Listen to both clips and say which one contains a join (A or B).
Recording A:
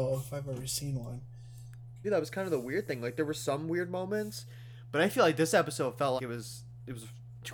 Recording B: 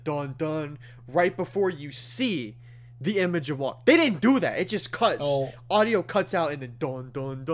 A